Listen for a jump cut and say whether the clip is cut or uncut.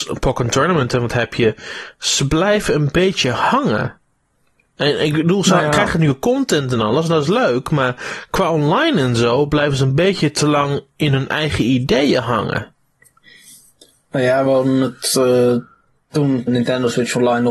cut